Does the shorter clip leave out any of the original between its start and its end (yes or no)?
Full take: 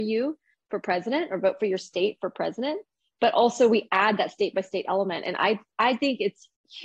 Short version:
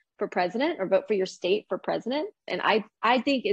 yes